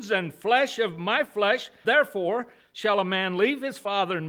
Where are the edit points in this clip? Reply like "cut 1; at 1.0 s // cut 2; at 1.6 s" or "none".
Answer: cut 1; at 1.8 s